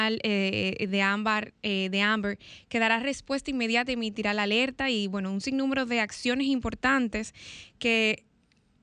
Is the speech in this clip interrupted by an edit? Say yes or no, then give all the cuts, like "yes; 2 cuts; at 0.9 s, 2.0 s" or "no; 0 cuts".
no; 0 cuts